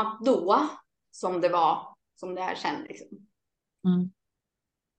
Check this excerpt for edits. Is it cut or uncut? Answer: cut